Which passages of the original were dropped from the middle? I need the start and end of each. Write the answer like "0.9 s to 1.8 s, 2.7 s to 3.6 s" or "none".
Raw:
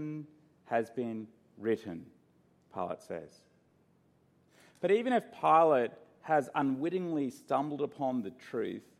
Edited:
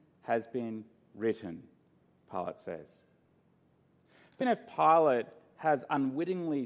4.8 s to 5.1 s